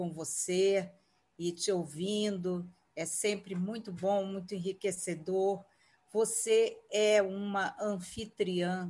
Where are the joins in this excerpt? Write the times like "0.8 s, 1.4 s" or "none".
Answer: none